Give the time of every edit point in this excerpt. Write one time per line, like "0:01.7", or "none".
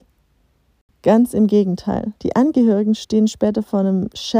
0:00.9
0:02.2

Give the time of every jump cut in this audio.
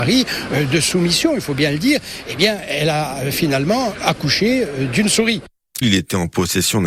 0:05.8

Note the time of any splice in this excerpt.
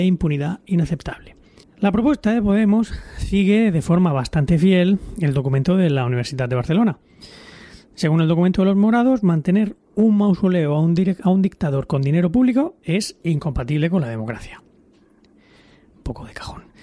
0:01.6

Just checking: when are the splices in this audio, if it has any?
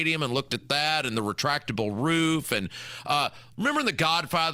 0:03.5

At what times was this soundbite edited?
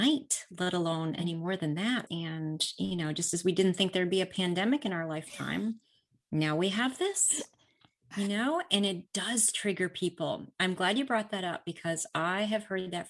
0:02.1

